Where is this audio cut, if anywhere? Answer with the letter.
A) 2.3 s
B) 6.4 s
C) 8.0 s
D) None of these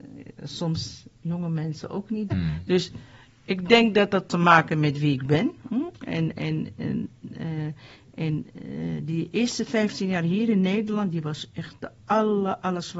A